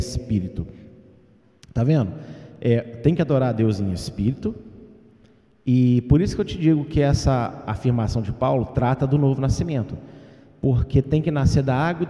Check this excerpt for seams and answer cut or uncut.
uncut